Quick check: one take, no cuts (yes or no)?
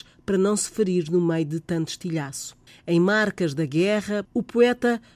no